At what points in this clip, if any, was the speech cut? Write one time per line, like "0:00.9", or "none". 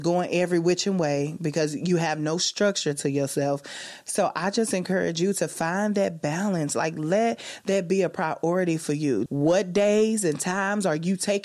0:09.3